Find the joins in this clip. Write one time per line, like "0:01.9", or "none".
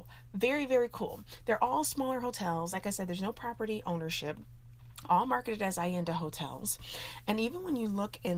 none